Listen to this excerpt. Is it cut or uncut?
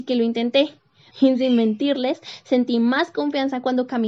cut